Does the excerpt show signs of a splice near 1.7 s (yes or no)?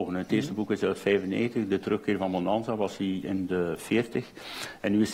no